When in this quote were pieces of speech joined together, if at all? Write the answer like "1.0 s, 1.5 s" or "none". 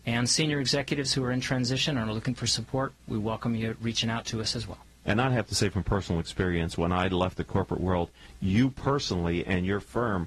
none